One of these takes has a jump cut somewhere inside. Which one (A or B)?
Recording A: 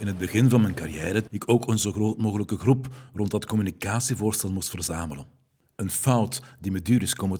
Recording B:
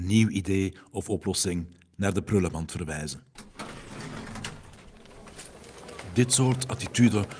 A